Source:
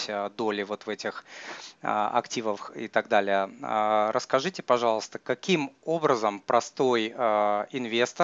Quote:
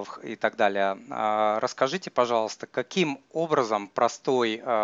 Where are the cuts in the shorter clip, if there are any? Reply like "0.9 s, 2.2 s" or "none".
none